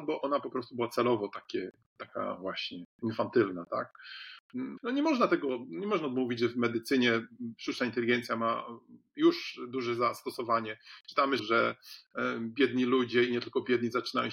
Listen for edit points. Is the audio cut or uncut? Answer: cut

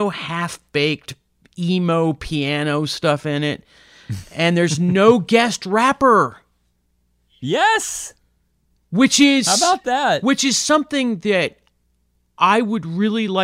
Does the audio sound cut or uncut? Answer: uncut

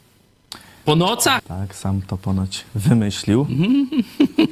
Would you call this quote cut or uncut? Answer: cut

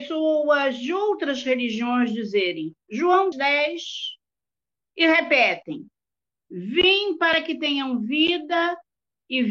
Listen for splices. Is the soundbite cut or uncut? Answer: cut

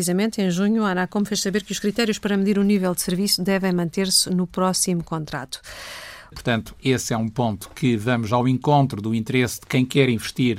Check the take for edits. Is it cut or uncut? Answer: cut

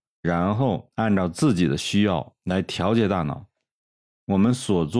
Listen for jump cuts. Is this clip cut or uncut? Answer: uncut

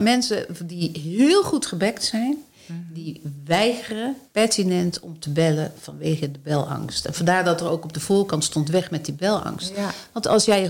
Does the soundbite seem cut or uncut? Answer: cut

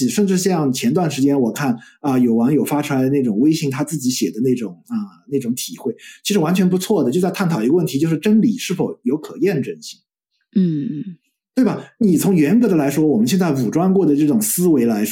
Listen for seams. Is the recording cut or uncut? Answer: uncut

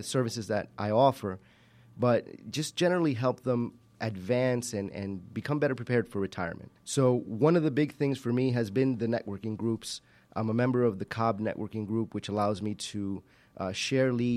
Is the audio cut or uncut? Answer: cut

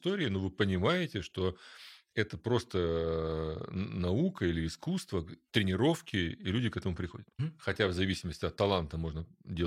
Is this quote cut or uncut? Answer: cut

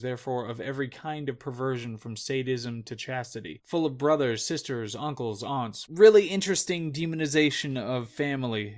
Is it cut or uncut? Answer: cut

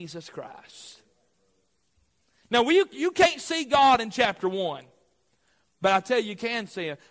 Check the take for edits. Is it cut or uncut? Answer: uncut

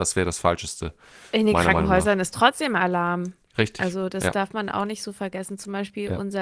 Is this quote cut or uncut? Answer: uncut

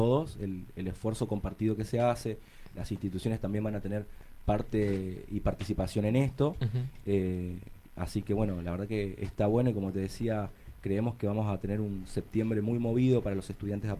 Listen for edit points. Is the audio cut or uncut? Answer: uncut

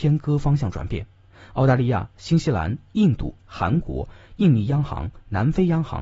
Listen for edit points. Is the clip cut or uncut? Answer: uncut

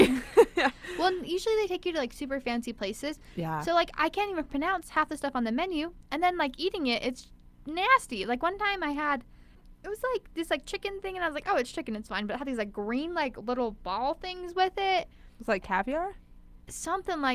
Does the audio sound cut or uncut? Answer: uncut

